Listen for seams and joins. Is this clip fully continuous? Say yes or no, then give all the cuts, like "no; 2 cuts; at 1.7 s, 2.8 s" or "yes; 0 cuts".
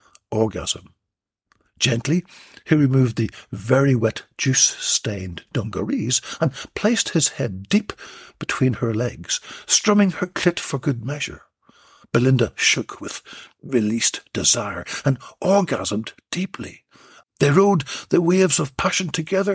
no; 1 cut; at 17.2 s